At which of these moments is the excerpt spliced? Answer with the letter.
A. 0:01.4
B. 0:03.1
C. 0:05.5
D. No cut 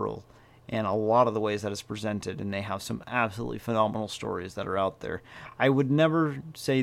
D